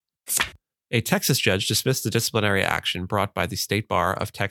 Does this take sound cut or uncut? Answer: uncut